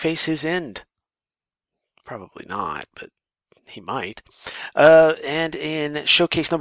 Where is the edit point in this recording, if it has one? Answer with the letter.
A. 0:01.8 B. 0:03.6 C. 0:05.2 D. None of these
D